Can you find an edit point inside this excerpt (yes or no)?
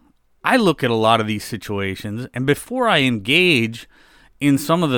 no